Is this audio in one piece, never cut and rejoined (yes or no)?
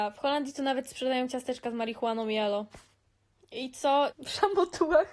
no